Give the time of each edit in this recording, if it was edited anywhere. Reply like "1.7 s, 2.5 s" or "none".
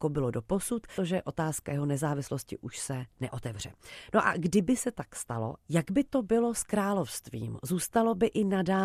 1.0 s

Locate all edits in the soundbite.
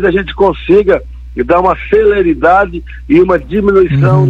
none

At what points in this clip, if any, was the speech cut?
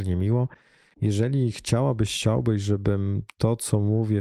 0.9 s

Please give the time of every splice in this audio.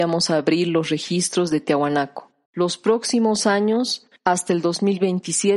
2.5 s, 4.2 s

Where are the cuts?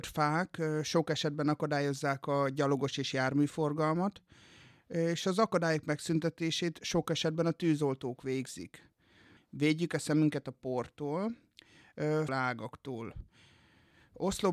9.4 s, 12.3 s

